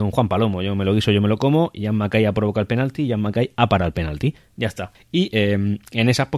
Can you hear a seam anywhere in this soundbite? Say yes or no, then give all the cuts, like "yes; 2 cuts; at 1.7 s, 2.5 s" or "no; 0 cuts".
yes; 1 cut; at 4.9 s